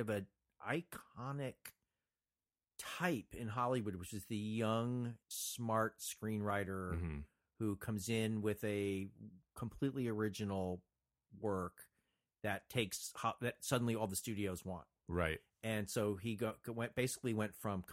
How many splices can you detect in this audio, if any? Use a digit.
1